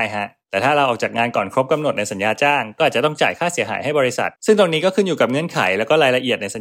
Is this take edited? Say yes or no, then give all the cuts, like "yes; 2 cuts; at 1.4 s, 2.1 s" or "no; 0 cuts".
yes; 1 cut; at 4.4 s